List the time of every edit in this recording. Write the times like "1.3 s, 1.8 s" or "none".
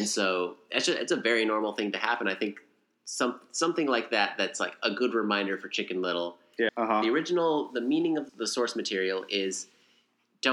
6.7 s, 8.3 s

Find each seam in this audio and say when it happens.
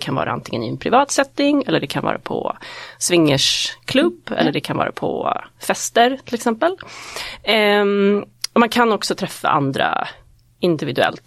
none

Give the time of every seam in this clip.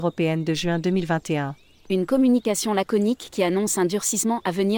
1.9 s

